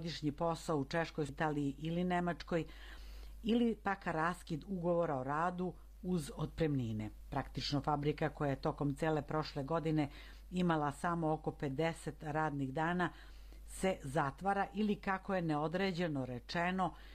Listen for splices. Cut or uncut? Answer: cut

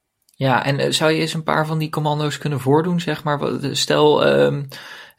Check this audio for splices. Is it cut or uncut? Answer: uncut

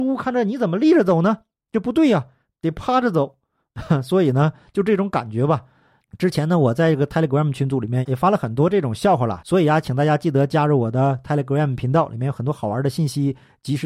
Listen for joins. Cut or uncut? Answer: uncut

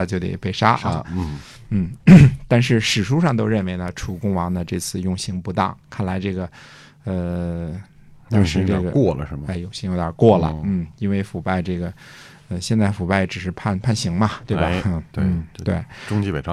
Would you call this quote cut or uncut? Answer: uncut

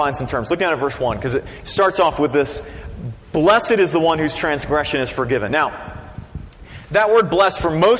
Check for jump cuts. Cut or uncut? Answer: uncut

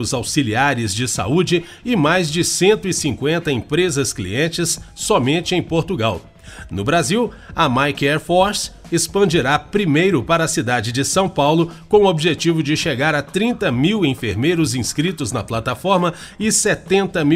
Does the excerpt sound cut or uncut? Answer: uncut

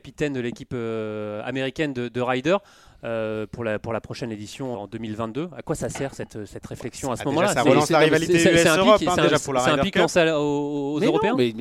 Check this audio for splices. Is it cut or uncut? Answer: cut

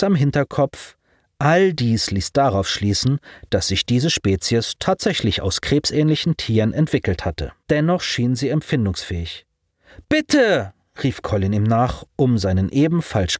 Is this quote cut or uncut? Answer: cut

